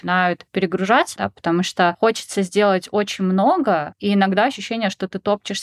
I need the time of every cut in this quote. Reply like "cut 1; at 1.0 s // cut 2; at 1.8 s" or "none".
cut 1; at 1.1 s